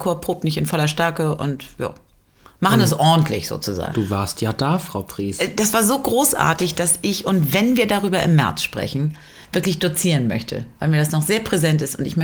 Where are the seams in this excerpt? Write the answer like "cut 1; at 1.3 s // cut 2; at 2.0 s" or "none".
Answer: cut 1; at 3.9 s